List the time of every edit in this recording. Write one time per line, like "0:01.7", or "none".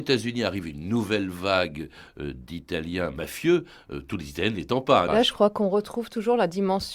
0:05.1